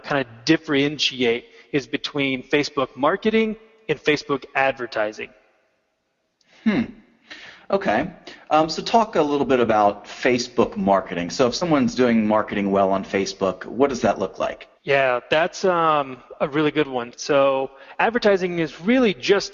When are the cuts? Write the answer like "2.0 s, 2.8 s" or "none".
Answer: 14.8 s, 17.1 s